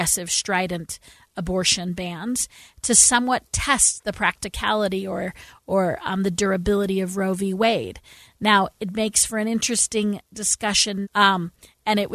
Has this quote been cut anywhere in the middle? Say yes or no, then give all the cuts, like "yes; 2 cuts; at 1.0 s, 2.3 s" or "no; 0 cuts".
yes; 1 cut; at 11.0 s